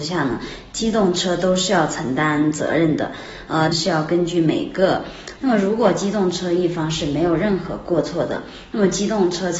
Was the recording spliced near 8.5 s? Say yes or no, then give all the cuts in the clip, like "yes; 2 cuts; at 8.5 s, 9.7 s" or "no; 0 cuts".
no; 2 cuts; at 3.7 s, 5.4 s